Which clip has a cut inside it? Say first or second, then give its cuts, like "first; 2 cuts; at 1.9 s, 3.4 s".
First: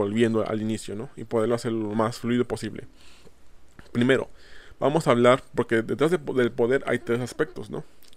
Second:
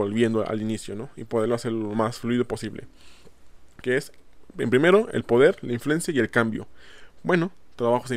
second; 2 cuts; at 3.8 s, 7.2 s